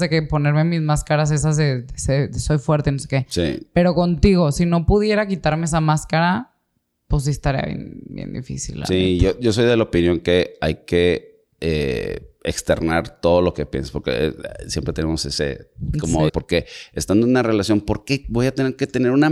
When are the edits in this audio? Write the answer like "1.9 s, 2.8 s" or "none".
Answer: 16.3 s

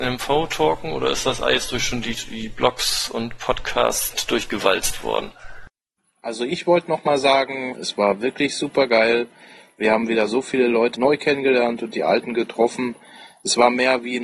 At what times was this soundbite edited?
7.7 s, 10.9 s

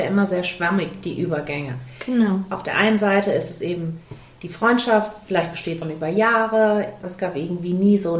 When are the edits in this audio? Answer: 5.8 s, 7.0 s

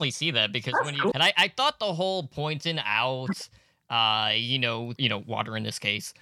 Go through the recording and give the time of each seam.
1.1 s, 5.0 s

